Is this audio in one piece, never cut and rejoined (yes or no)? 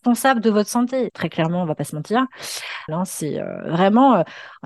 no